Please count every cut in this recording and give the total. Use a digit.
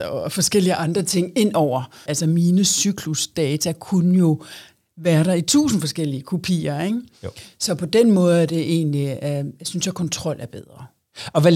1